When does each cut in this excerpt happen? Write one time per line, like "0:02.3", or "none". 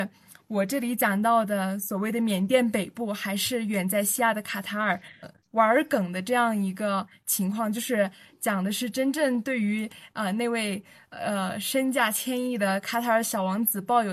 0:05.2